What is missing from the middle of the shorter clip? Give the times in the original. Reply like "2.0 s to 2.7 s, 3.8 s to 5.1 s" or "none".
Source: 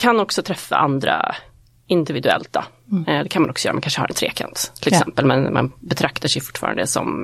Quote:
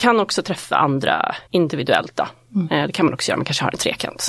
1.5 s to 1.8 s